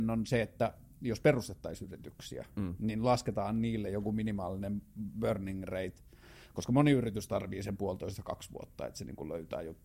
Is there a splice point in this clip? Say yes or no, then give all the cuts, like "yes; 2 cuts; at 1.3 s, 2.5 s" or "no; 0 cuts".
no; 0 cuts